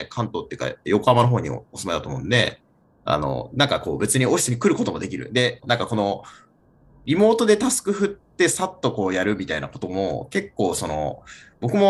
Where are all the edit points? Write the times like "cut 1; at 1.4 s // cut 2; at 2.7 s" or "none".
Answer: cut 1; at 5.6 s